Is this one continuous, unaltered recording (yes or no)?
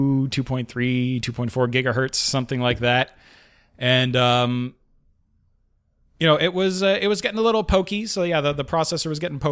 yes